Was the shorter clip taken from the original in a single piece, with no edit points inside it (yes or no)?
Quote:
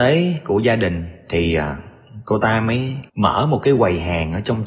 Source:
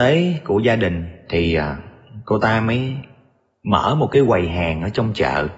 no